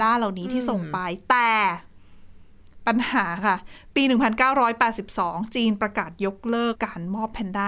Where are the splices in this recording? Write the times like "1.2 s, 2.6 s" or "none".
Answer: 6.7 s